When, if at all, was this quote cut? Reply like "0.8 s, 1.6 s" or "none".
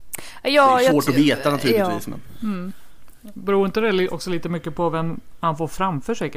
none